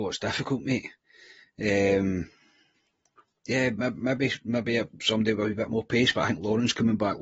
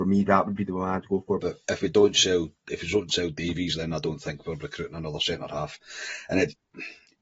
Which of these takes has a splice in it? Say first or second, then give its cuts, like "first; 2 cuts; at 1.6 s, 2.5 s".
second; 1 cut; at 1.4 s